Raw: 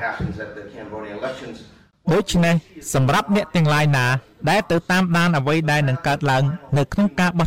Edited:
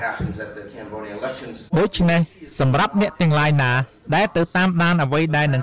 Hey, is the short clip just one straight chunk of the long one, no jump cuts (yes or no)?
no